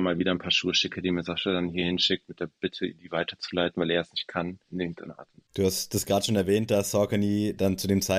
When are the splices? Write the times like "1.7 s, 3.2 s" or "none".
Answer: 4.6 s